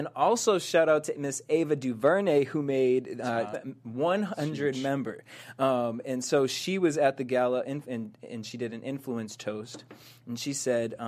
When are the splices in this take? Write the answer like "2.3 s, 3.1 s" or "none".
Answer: 3.5 s

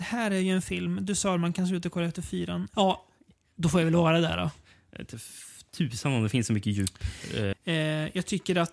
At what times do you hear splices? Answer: 2.7 s, 7.5 s

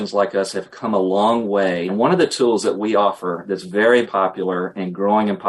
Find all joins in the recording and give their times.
1.9 s, 4.0 s

